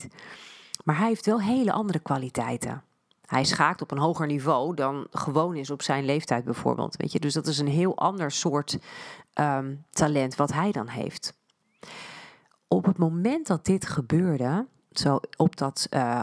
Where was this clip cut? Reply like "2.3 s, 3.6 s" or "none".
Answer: none

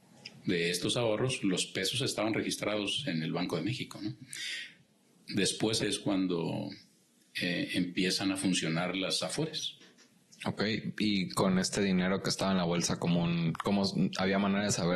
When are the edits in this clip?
5.8 s

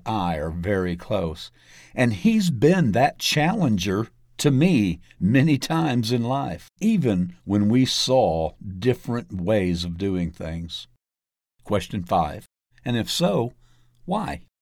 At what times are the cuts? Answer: 6.8 s, 12.7 s

